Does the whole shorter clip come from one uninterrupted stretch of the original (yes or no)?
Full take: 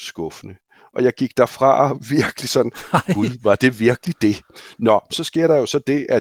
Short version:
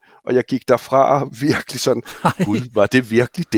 yes